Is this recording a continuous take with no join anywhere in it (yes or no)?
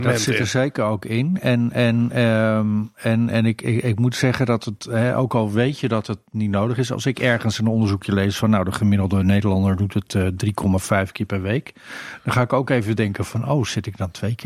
yes